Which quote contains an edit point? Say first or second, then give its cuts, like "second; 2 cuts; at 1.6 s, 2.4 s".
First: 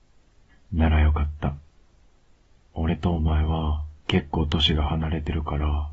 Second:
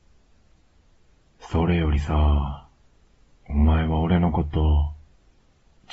first; 2 cuts; at 2.7 s, 4.0 s